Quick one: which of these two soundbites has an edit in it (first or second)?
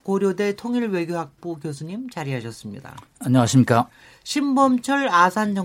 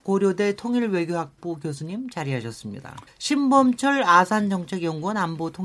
second